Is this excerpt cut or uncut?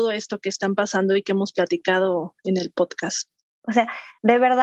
cut